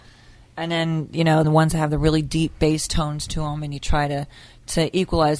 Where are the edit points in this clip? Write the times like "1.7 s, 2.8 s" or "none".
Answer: 1.4 s